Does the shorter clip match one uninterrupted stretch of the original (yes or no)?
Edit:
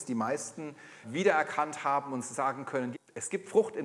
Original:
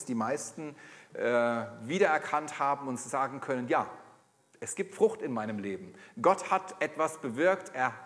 no